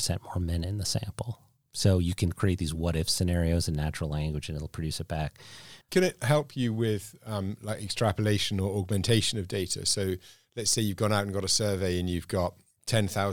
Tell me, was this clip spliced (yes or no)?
yes